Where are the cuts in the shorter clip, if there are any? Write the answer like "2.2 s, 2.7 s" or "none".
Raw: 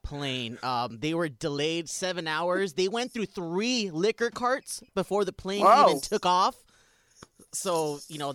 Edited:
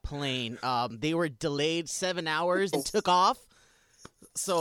2.7 s